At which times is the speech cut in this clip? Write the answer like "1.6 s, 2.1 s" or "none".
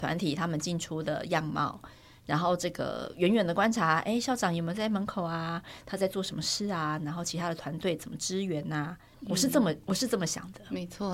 9.1 s